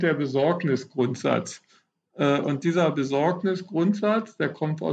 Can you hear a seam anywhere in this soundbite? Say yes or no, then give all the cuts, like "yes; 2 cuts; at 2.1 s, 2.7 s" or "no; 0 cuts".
no; 0 cuts